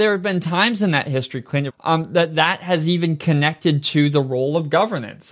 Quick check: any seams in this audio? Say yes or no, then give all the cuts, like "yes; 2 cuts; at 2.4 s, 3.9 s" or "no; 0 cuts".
yes; 1 cut; at 1.7 s